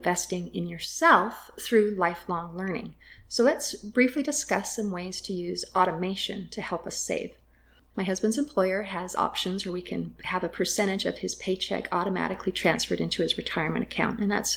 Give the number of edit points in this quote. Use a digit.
1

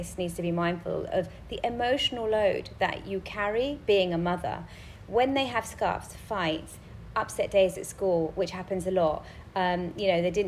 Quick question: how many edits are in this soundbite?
0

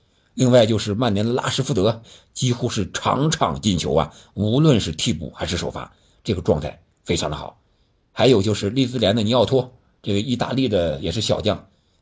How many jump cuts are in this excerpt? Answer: 1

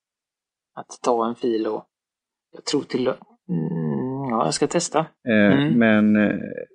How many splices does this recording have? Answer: 1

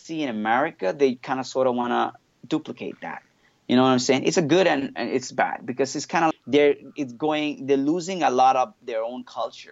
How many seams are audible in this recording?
1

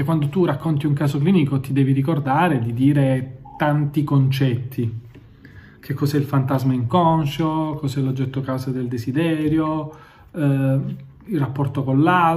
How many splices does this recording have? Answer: 0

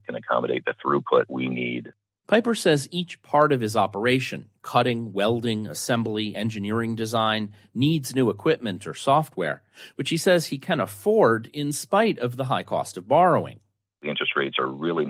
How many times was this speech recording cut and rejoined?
0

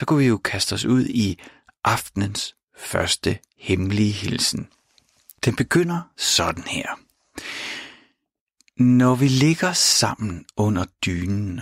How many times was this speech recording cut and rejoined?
0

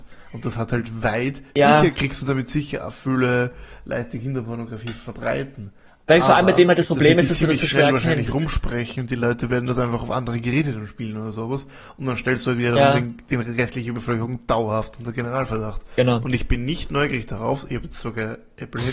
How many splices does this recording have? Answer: 0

